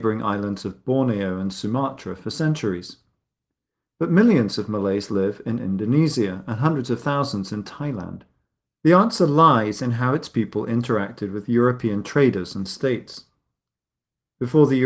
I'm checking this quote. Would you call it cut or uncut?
cut